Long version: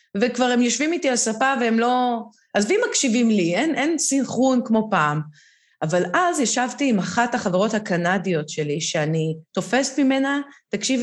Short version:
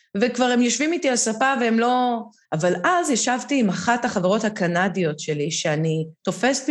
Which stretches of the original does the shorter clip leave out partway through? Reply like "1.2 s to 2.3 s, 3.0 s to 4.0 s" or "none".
2.4 s to 5.7 s